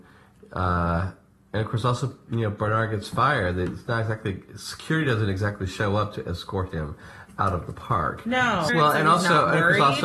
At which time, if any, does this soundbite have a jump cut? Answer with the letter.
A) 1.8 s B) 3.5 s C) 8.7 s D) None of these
C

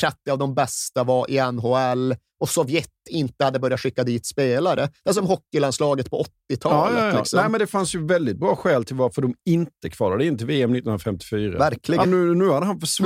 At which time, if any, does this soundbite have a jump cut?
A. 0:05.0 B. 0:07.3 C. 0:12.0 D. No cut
C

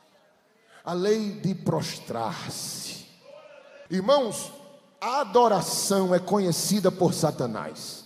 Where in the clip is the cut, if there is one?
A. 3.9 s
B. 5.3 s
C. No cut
A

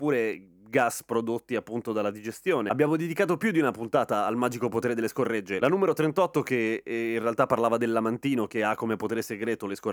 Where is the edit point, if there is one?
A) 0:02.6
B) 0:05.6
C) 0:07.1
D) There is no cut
D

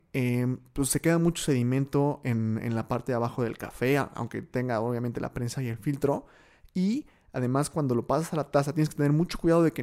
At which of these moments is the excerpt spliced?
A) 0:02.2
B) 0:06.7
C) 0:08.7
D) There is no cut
D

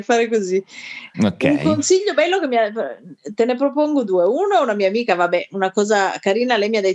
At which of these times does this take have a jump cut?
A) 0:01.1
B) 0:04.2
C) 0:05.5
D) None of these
A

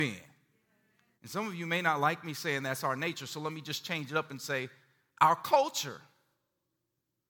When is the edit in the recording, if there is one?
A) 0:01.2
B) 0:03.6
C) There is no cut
A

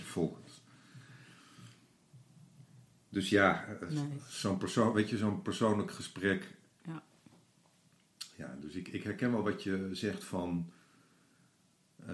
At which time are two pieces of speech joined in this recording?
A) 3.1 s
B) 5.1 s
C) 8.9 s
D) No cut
D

